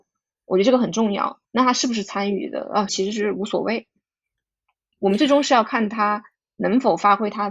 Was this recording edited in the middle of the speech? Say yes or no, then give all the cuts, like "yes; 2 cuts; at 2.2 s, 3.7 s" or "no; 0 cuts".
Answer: yes; 2 cuts; at 1.4 s, 2.9 s